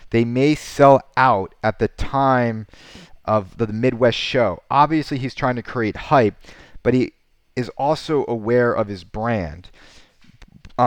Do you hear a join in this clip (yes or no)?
no